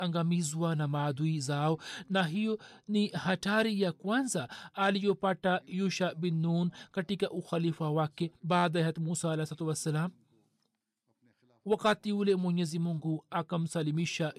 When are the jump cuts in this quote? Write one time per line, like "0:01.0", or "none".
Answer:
0:08.4